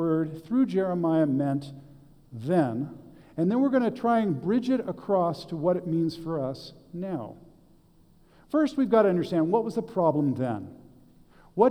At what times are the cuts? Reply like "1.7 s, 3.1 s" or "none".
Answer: none

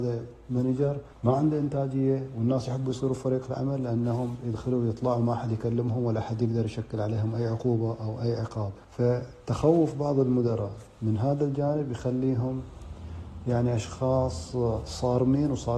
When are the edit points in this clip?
1.1 s, 8.8 s

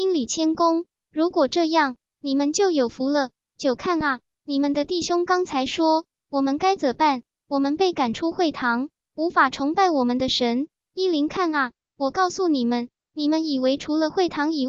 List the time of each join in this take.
none

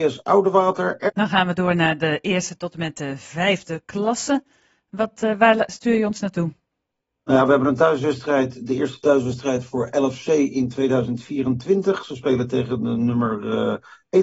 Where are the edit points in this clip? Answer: 1.1 s

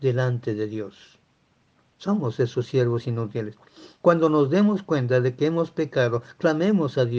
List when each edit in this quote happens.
none

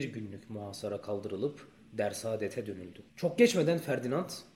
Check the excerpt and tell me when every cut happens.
3.1 s

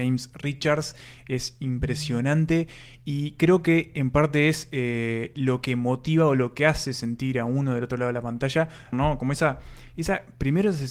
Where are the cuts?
8.9 s

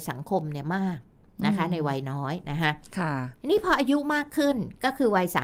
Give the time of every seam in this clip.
3.4 s

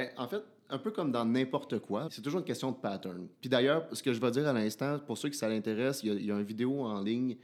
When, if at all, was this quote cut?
2.1 s

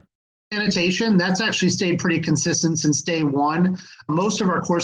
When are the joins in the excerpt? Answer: none

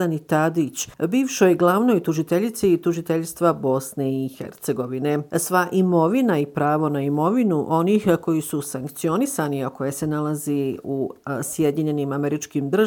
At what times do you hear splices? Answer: none

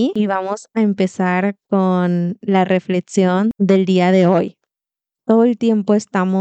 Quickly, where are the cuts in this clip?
5.2 s

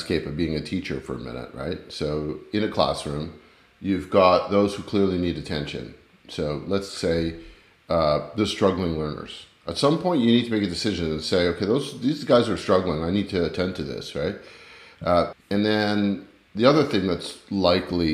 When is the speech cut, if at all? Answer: 15.3 s

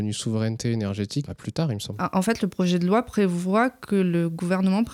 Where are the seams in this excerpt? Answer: 1.3 s

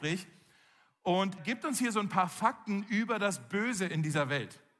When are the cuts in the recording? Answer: 1.4 s

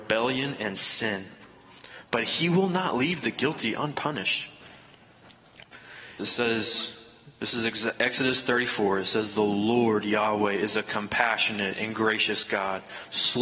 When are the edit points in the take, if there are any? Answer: 6.2 s

